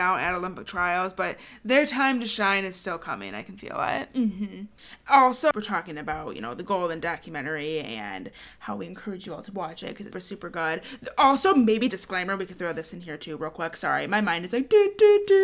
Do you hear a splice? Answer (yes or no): yes